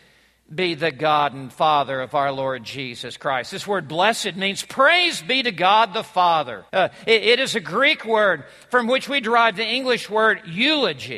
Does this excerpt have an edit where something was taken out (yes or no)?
yes